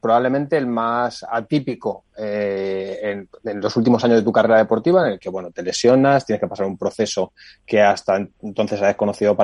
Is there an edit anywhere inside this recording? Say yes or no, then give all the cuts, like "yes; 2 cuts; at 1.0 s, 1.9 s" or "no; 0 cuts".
no; 0 cuts